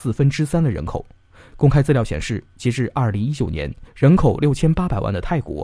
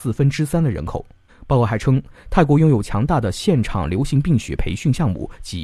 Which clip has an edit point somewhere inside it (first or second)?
second